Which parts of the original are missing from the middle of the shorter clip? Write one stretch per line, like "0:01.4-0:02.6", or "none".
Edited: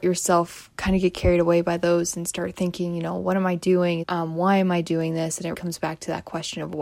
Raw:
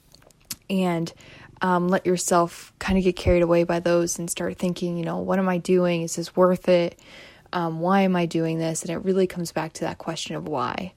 0:06.0-0:07.5
0:09.0-0:09.3